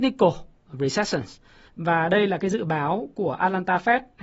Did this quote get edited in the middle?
yes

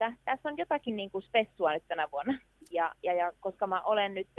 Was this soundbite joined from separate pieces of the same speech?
yes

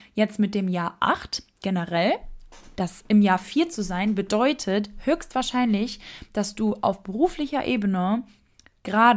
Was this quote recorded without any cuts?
yes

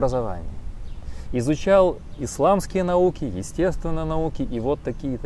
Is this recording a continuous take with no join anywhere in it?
yes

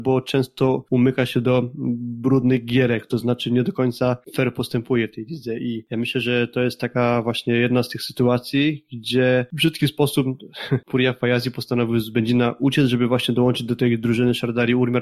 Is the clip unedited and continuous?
yes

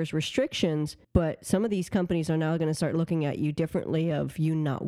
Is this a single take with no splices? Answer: no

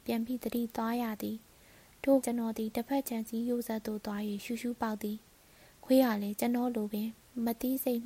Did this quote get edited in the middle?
yes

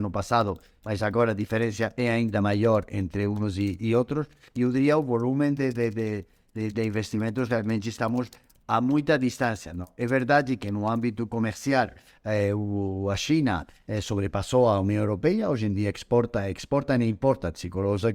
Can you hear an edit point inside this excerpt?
no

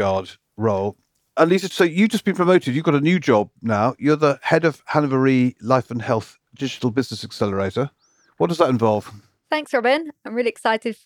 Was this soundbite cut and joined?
no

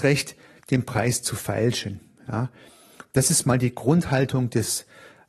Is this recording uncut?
yes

